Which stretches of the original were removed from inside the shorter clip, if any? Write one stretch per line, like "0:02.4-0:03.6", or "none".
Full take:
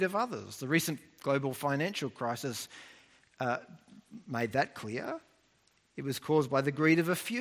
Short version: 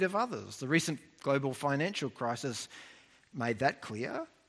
0:03.3-0:04.2